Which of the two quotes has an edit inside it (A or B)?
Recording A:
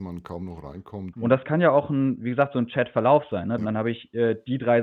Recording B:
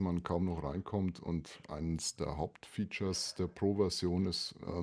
A